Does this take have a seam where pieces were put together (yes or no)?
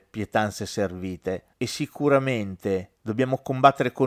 no